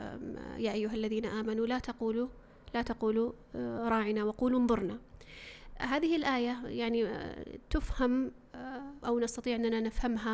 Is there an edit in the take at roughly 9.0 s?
yes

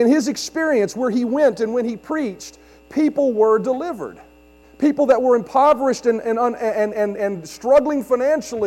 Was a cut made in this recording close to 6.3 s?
no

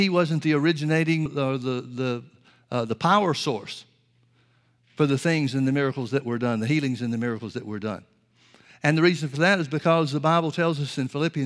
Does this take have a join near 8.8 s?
no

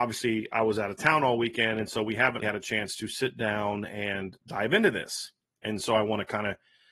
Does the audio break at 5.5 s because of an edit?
no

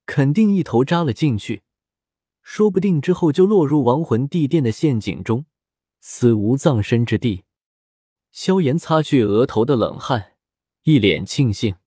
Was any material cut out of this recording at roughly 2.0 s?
no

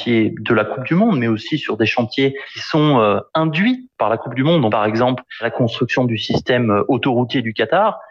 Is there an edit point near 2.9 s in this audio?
no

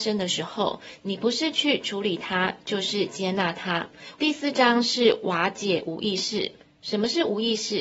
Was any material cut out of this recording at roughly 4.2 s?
yes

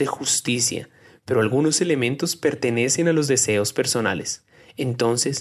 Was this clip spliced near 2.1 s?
no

